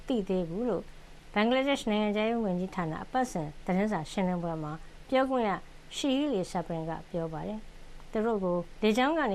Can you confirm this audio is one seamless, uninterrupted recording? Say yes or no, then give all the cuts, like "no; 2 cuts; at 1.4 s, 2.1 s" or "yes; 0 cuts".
yes; 0 cuts